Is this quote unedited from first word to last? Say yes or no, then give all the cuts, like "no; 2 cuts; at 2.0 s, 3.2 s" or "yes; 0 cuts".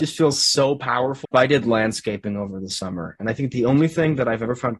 no; 1 cut; at 1.2 s